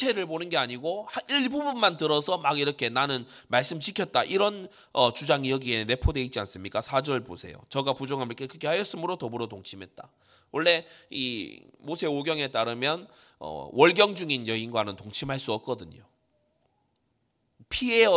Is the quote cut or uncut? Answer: uncut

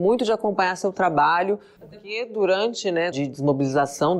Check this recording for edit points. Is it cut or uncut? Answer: cut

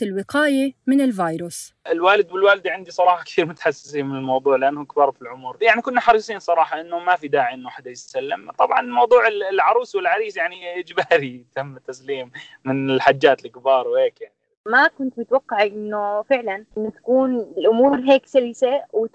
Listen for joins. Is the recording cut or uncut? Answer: cut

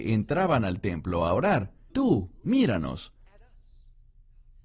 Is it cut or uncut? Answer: cut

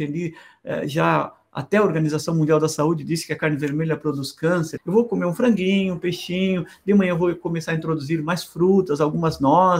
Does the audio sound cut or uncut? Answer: cut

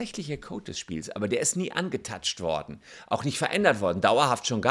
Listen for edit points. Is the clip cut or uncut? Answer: uncut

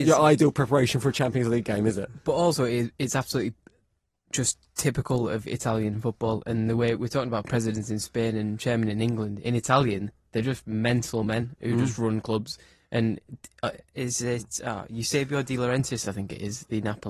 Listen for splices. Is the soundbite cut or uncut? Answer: uncut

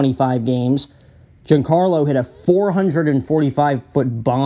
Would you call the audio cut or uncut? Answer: uncut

